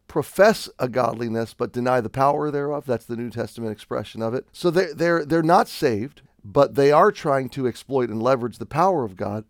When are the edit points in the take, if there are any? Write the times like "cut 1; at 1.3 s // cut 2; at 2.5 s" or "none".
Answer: cut 1; at 4.5 s // cut 2; at 6.3 s